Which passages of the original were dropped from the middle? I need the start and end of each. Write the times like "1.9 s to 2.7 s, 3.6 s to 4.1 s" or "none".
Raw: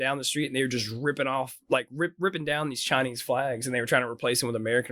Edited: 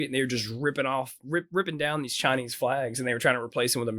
1.6 s to 1.9 s